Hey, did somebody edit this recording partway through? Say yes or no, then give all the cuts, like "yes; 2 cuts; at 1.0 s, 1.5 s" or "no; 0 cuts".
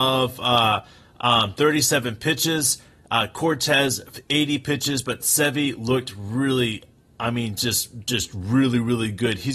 no; 0 cuts